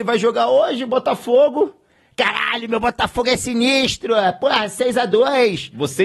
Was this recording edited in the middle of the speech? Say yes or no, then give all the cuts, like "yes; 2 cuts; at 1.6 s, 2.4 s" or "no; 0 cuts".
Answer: no; 0 cuts